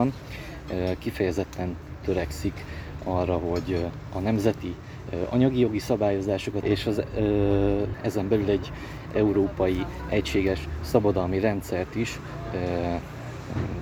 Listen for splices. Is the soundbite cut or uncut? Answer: cut